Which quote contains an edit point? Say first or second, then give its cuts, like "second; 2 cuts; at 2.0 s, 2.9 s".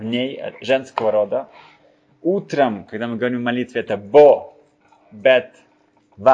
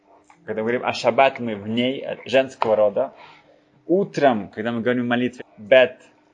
second; 1 cut; at 5.4 s